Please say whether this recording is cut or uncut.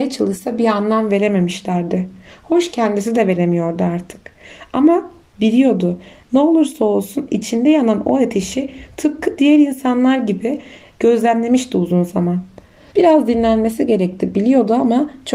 cut